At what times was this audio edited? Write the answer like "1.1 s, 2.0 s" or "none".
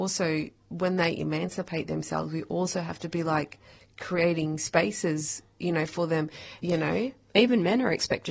6.6 s

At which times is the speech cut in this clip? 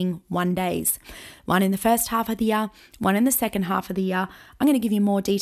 none

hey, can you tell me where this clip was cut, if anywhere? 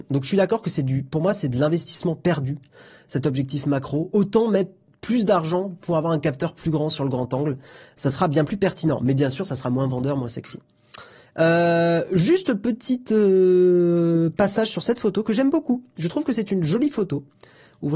none

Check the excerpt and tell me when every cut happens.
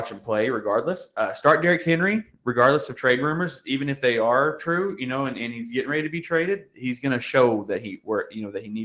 none

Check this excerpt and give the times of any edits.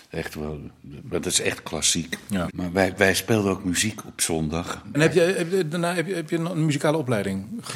2.5 s, 4.9 s

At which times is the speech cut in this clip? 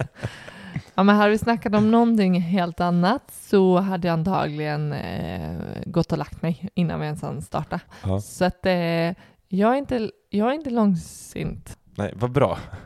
none

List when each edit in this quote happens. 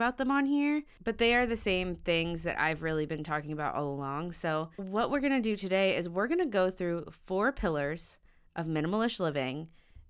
4.8 s

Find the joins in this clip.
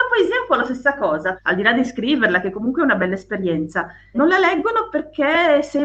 1.4 s, 4.1 s

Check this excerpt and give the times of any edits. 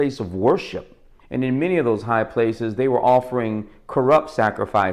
1.2 s

